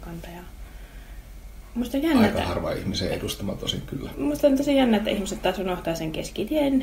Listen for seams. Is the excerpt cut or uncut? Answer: cut